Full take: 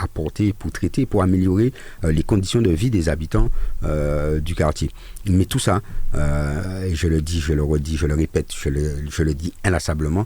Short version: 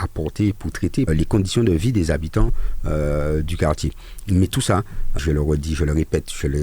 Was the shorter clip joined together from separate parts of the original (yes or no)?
yes